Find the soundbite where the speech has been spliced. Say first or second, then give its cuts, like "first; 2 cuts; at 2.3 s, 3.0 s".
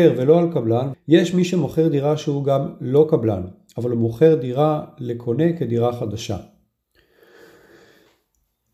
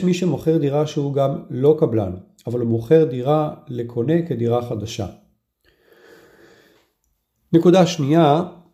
first; 1 cut; at 0.9 s